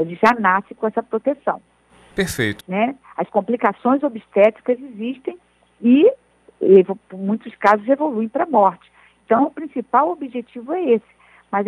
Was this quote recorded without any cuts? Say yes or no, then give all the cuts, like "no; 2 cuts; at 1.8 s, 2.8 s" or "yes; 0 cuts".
no; 1 cut; at 2.6 s